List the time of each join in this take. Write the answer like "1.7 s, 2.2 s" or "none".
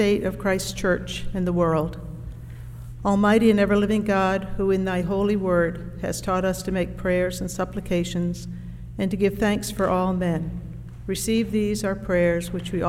none